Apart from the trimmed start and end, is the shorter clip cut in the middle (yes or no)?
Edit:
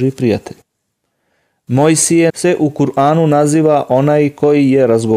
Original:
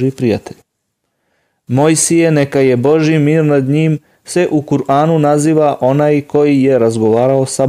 yes